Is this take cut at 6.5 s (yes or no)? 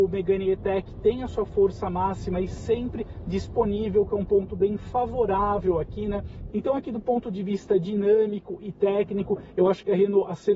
yes